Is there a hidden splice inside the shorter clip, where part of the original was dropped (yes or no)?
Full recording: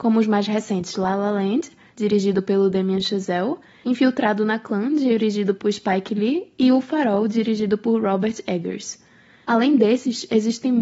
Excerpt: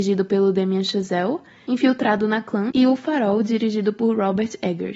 yes